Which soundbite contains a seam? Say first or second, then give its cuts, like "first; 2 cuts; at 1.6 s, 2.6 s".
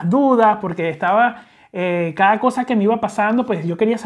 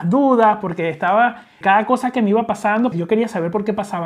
second; 2 cuts; at 1.6 s, 2.9 s